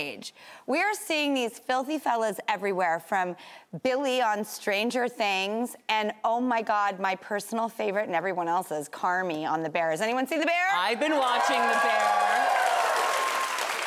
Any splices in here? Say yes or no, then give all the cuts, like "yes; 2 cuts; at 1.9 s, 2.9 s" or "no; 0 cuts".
no; 0 cuts